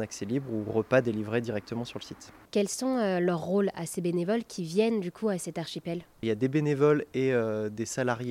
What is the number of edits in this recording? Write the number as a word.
two